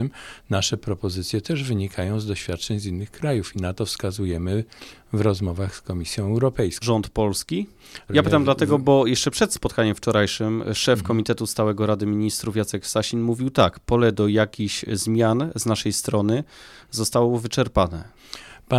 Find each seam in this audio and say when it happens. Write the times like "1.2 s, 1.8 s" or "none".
6.8 s, 8.1 s